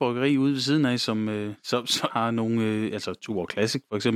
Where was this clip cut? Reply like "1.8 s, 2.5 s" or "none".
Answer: 2.1 s